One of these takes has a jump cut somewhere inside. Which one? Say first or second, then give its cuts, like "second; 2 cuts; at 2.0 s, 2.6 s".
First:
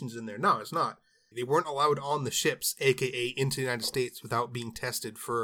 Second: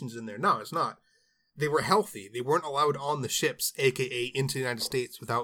first; 1 cut; at 1.3 s